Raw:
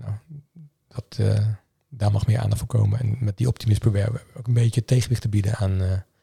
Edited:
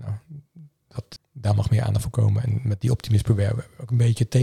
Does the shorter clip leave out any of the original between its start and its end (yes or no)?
yes